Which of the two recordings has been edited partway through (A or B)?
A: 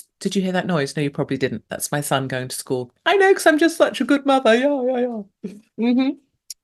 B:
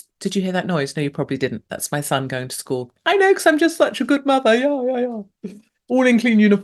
A